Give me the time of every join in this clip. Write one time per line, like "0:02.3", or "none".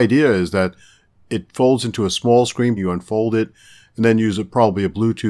0:02.8